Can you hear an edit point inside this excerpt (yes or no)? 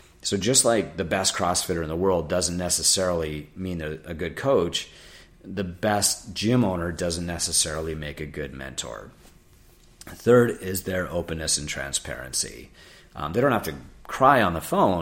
no